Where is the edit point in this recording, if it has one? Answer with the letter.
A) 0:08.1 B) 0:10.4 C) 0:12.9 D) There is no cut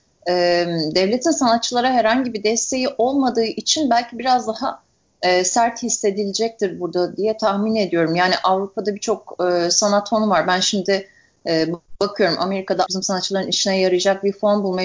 C